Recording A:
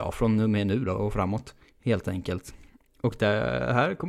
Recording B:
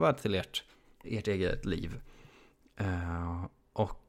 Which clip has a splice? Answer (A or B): B